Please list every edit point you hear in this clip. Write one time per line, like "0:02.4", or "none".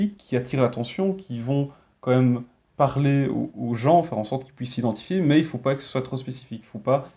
none

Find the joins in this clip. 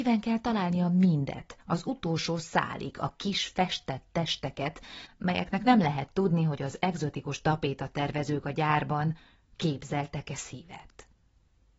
none

